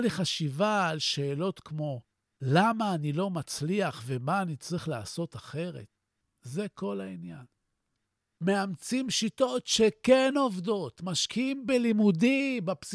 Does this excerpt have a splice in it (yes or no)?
yes